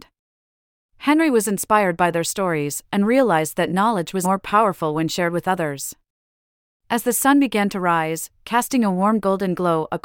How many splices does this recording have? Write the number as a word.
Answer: one